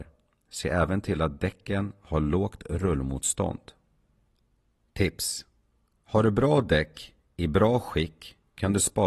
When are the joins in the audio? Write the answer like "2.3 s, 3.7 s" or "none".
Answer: none